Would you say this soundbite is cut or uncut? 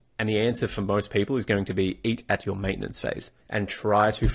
cut